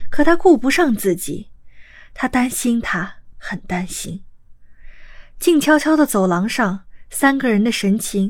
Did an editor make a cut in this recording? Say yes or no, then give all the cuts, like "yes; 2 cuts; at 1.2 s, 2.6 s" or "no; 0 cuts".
yes; 1 cut; at 3.3 s